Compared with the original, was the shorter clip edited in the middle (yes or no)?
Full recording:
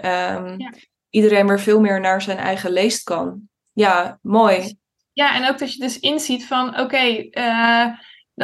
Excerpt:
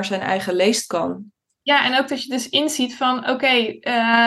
yes